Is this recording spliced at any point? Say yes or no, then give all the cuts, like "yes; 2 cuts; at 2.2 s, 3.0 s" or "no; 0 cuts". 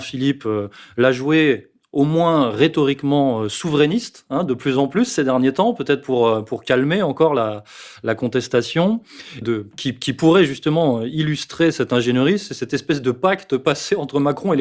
yes; 1 cut; at 9.4 s